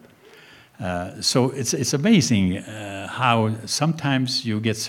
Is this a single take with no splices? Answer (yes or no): yes